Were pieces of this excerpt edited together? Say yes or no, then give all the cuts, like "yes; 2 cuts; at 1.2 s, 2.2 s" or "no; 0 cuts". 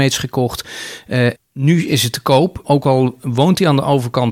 yes; 2 cuts; at 1.3 s, 2.6 s